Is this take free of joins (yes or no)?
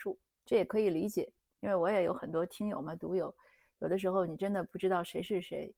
yes